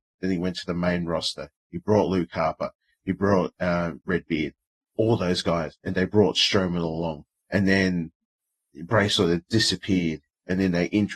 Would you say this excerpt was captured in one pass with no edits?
no; 2 cuts; at 4.1 s, 7.3 s

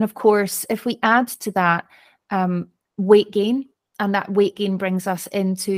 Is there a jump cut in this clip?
no; 0 cuts

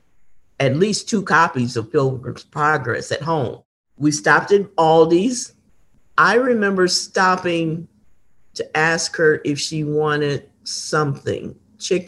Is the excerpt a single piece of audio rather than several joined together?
yes; 0 cuts

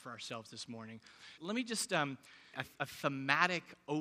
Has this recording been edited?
yes; 2 cuts; at 1.4 s, 2.5 s

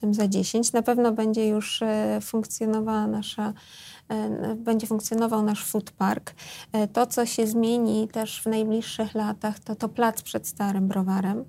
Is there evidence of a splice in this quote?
yes; 1 cut; at 9.8 s

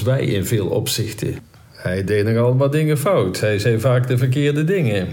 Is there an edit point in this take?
no; 0 cuts

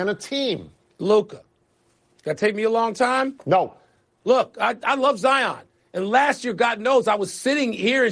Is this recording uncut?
yes; 0 cuts

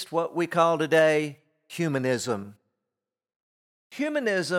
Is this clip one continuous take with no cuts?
yes; 0 cuts

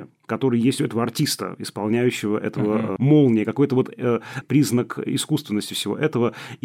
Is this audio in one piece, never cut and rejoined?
no; 2 cuts; at 3.0 s, 4.4 s

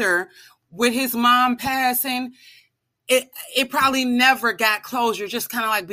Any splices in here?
no; 0 cuts

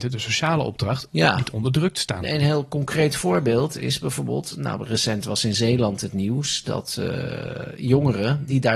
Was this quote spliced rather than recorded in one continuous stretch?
no; 0 cuts

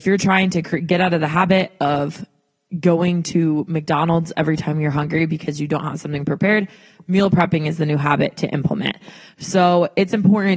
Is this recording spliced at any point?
no; 0 cuts

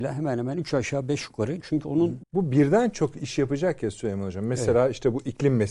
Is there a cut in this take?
yes; 1 cut; at 2.2 s

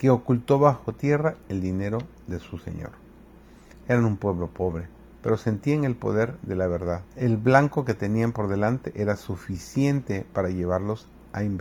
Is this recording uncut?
no; 2 cuts; at 3.7 s, 7.1 s

